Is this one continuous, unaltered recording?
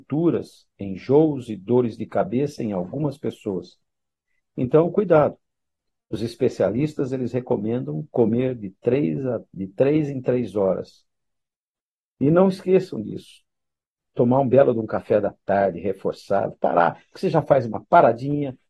yes; 0 cuts

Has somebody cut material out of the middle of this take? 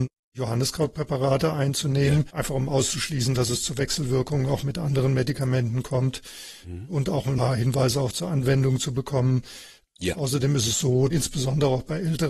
yes; 2 cuts; at 2.3 s, 11.1 s

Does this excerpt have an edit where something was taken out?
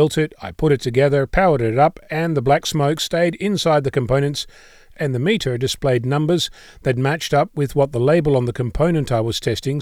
no; 0 cuts

